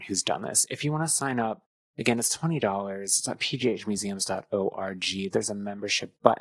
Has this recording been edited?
no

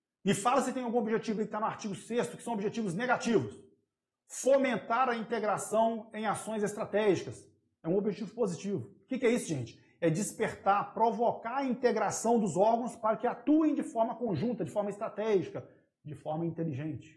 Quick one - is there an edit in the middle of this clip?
no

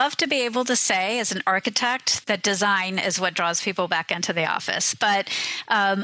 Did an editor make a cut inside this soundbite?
yes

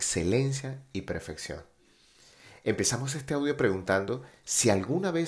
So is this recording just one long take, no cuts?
yes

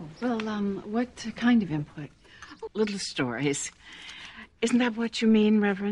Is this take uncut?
no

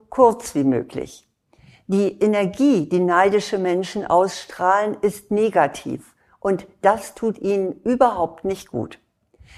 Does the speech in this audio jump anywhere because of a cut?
no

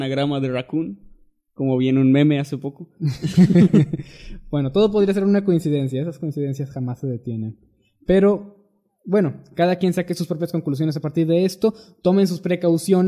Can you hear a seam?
no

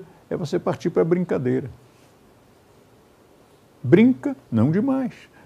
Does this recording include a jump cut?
no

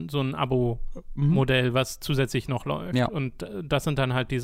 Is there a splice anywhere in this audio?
no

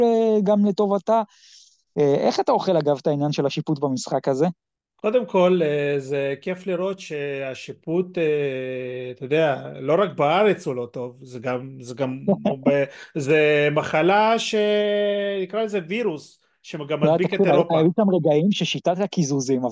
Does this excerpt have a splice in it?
no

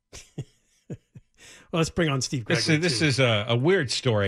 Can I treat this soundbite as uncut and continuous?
yes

